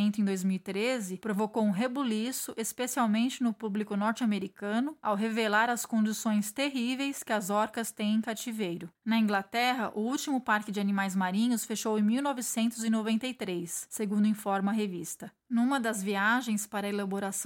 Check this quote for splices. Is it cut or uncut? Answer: cut